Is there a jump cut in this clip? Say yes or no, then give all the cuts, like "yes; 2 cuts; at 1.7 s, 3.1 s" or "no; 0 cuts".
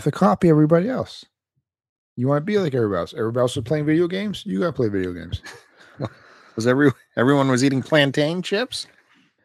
no; 0 cuts